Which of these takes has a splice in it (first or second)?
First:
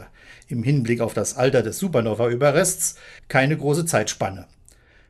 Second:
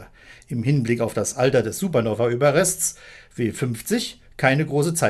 first